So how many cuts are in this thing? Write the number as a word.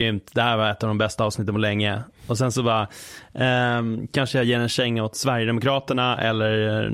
zero